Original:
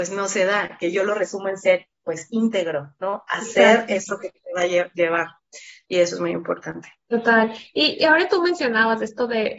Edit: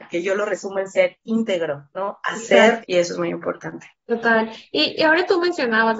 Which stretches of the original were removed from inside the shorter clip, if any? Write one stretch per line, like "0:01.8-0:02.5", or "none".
0:01.9-0:02.3
0:03.9-0:05.8